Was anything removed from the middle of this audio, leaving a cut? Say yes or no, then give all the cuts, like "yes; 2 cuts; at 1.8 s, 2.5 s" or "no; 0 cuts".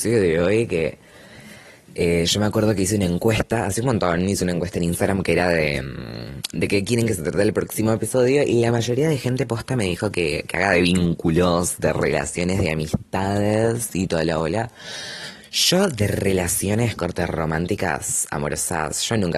no; 0 cuts